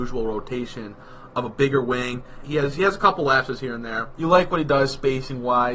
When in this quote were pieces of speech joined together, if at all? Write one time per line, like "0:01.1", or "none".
0:02.4
0:04.2